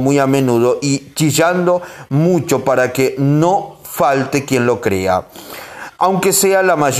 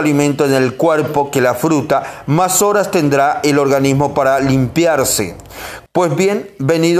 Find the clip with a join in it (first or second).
second